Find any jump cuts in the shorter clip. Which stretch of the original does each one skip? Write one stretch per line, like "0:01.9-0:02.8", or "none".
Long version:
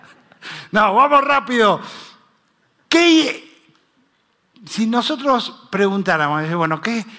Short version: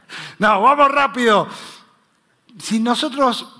0:02.8-0:04.5